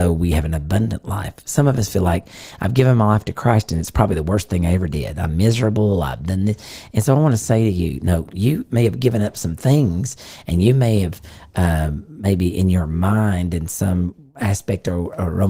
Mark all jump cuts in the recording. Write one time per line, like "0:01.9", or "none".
none